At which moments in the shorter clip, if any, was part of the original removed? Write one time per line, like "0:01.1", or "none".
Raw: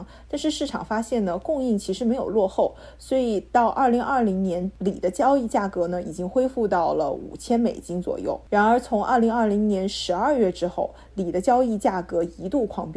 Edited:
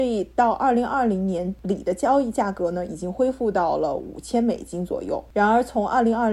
none